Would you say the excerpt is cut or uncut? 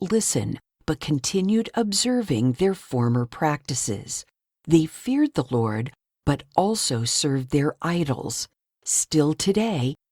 uncut